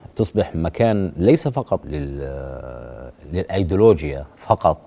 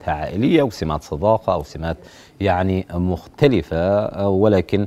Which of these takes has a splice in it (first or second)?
first